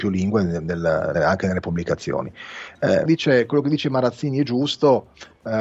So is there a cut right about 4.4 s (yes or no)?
no